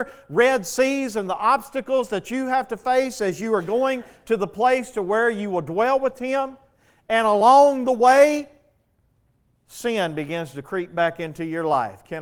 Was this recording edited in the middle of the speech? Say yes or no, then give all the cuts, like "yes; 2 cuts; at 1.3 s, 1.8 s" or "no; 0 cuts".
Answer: no; 0 cuts